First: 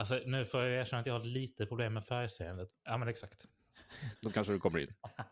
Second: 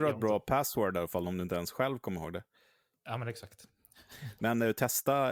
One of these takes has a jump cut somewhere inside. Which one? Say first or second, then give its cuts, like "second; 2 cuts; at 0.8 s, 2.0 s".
first; 2 cuts; at 2.7 s, 4.2 s